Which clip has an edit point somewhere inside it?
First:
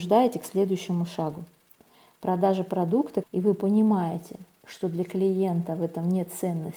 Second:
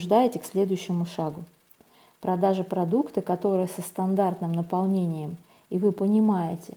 first; 1 cut; at 3.2 s

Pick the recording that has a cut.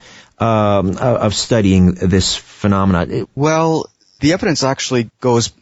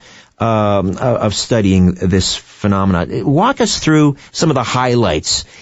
first; 1 cut; at 3.2 s

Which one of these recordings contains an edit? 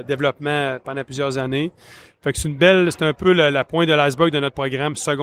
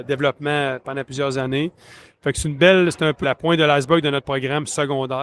second; 1 cut; at 3.2 s

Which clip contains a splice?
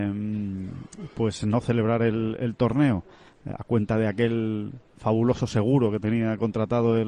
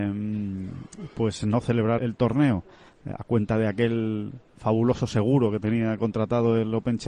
second; 1 cut; at 2.0 s

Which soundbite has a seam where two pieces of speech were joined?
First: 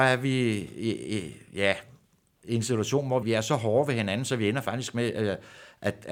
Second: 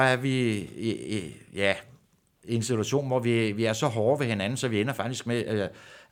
first; 1 cut; at 3.2 s

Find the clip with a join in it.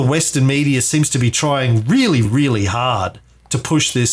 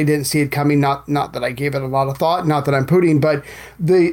first; 1 cut; at 2.2 s

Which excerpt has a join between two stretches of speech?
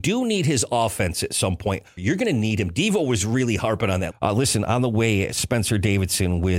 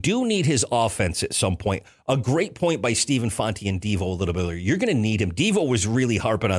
first; 2 cuts; at 2.0 s, 4.1 s

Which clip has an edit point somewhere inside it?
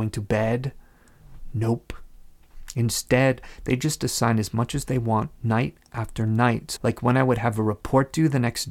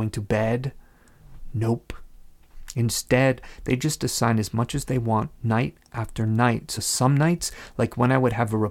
first; 1 cut; at 6.8 s

